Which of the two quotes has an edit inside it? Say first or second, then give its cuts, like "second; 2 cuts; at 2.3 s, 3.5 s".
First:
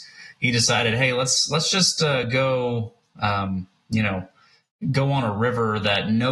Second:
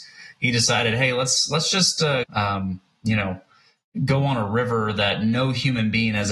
second; 1 cut; at 2.2 s